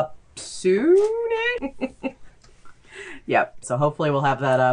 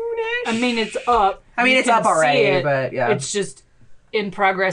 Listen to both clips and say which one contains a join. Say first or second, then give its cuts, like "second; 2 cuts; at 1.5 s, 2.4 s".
first; 2 cuts; at 1.6 s, 3.6 s